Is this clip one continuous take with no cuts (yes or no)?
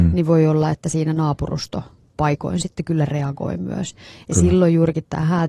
yes